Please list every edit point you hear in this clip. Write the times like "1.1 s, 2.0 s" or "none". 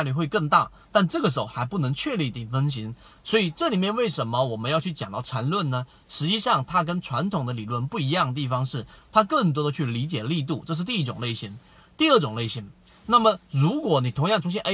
3.1 s